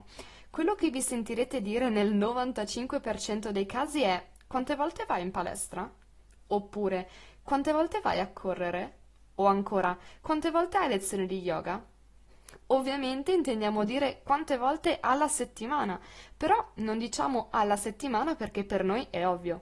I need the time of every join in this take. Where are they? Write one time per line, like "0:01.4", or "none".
none